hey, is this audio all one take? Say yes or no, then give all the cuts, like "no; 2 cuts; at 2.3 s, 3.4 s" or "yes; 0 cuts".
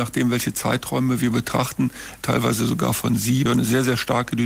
no; 2 cuts; at 2.2 s, 3.5 s